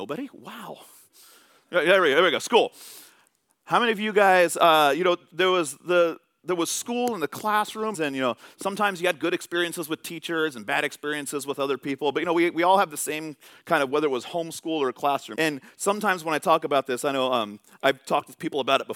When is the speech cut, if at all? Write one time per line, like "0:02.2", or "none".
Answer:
0:07.9
0:15.3